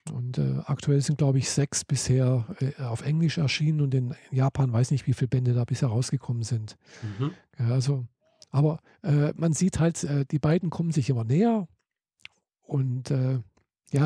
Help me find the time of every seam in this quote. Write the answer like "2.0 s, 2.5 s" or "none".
none